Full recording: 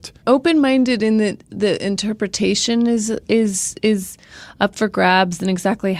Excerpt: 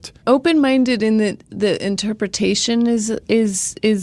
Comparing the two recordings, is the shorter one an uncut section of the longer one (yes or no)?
yes